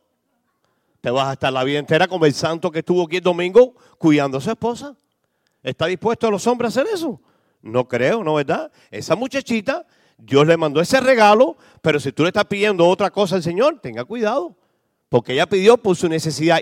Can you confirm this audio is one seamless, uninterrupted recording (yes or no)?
yes